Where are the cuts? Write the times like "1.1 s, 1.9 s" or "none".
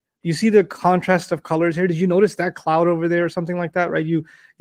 none